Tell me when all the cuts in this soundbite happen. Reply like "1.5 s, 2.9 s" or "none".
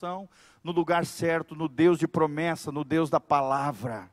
none

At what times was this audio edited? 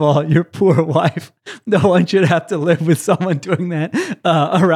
none

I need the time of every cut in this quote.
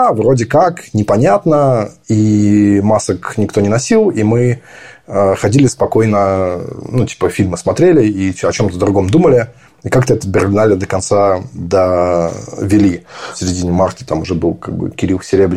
none

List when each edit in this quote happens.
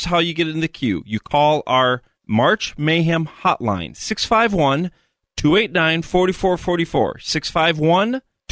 none

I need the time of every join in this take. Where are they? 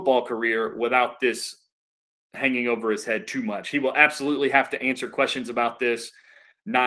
none

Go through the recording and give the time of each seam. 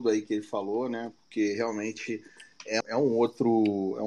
2.8 s

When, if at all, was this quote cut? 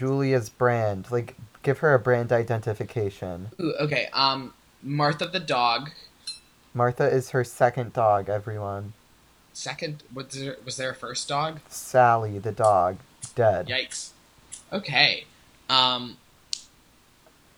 none

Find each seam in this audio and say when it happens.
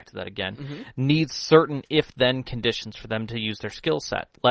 none

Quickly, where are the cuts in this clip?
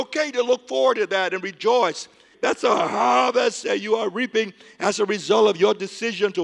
2.3 s

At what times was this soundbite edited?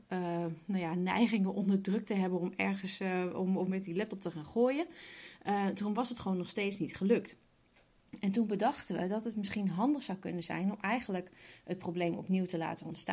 none

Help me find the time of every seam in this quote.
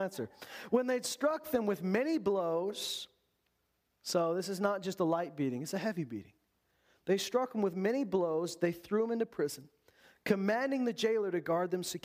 none

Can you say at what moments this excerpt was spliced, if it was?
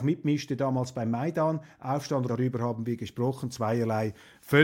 2.3 s

